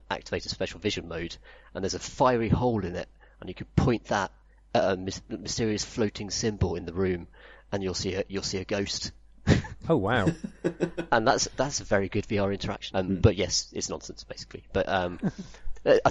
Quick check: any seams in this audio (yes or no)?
yes